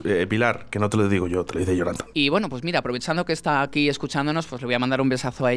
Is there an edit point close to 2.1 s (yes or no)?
yes